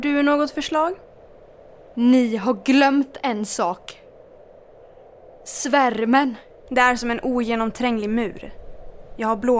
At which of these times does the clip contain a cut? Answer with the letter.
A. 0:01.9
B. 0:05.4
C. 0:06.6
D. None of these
C